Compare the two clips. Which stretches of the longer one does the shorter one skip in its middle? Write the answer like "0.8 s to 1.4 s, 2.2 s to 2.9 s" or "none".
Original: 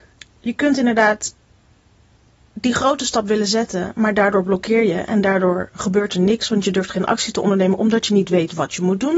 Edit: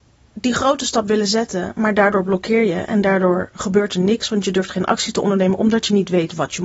none

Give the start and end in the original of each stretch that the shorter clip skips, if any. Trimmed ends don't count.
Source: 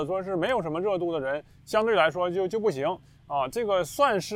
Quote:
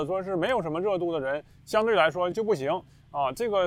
2.3 s to 2.5 s

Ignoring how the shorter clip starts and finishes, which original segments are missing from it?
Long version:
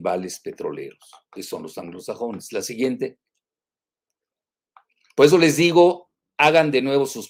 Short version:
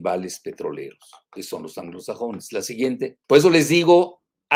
3.2 s to 5.1 s

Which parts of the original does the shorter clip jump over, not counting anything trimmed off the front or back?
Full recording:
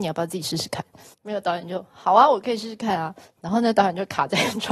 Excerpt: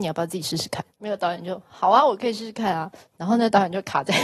0.9 s to 1.1 s

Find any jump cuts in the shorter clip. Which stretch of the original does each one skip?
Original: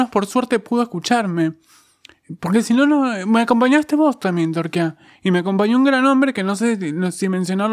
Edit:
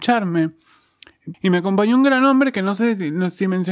2.4 s to 5.2 s

